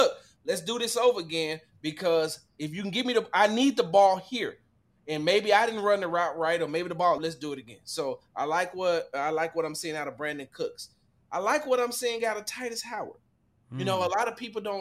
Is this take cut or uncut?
cut